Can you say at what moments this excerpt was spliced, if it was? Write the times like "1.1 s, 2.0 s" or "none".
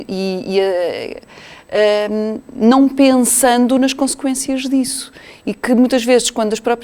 1.3 s